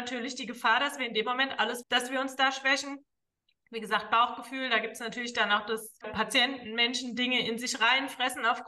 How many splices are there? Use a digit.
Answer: 2